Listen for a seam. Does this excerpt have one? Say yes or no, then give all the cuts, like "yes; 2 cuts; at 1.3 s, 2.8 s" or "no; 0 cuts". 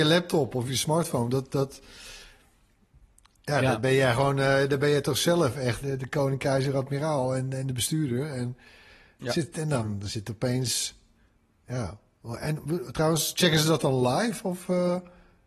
yes; 1 cut; at 5.8 s